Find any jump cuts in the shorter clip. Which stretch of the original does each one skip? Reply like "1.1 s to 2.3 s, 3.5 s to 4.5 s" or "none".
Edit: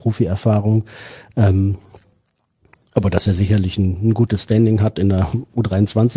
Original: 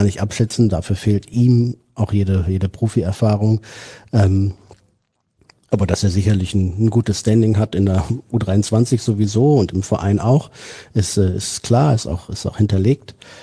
none